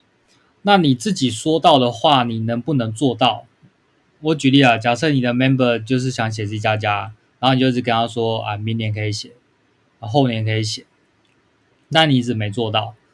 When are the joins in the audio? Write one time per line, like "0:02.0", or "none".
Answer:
none